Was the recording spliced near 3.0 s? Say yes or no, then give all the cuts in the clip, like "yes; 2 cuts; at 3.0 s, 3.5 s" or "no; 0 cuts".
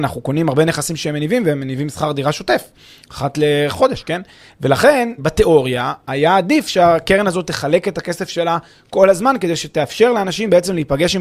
no; 1 cut; at 5.2 s